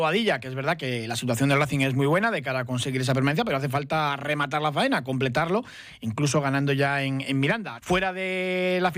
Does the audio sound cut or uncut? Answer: cut